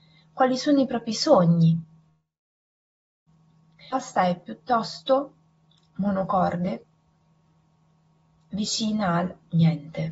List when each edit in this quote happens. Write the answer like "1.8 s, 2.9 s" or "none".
none